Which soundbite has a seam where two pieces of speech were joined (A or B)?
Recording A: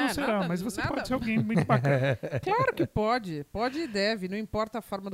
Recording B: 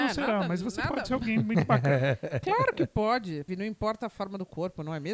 B